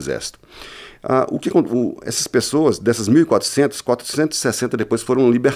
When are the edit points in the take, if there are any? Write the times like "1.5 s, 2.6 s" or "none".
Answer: none